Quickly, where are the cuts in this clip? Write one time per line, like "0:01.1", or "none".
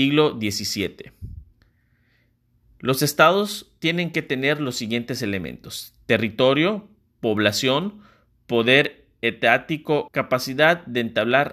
0:10.1